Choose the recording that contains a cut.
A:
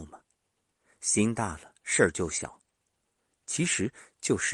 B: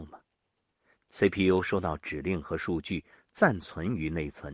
B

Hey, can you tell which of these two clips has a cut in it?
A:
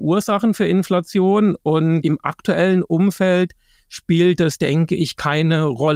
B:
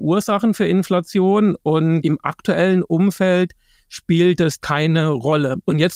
B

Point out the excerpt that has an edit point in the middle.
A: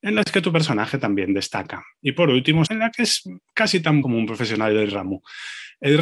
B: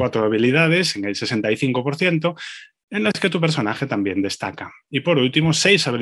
A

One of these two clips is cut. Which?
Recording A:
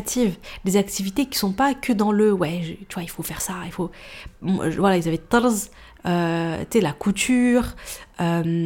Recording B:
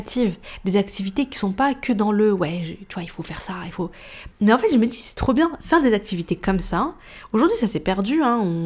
B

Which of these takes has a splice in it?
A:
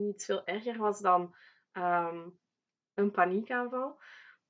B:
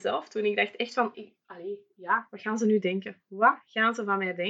B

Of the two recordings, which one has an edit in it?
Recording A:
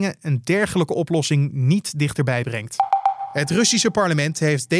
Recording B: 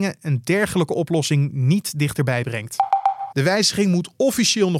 B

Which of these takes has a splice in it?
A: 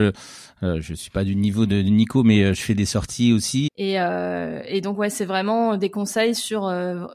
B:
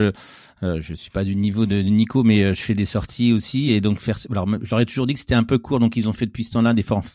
A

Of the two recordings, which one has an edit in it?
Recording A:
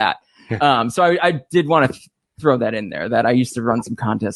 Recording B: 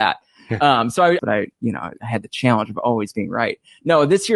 B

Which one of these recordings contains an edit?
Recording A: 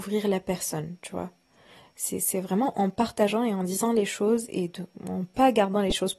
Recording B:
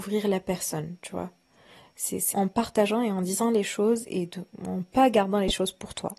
B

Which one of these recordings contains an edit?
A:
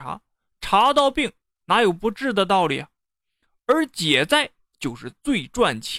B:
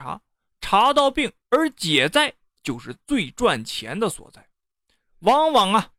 B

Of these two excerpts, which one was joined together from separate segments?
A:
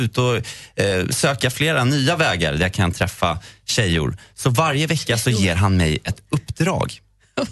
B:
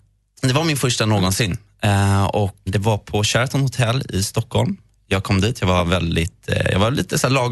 B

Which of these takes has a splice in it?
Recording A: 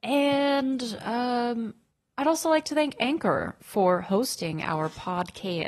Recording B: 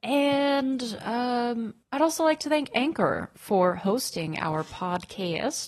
B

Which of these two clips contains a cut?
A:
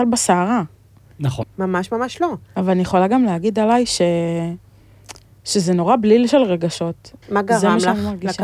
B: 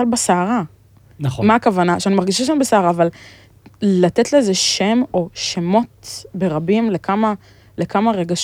A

